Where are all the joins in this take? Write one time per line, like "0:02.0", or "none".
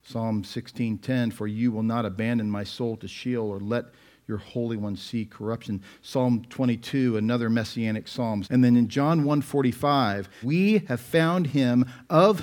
0:08.4
0:10.4